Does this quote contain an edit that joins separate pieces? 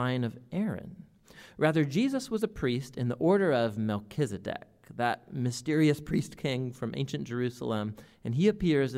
no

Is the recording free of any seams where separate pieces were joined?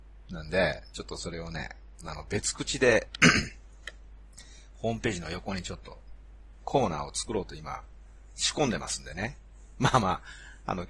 yes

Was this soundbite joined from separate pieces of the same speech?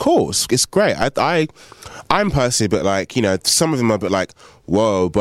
no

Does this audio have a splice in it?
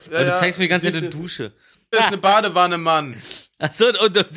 yes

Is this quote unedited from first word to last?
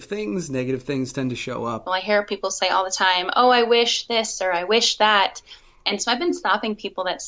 no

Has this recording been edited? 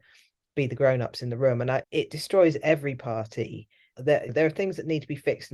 yes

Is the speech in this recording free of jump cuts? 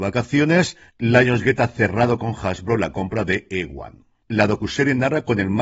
no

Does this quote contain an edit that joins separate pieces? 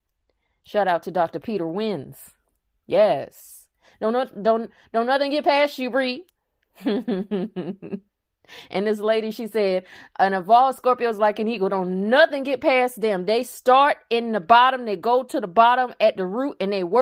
no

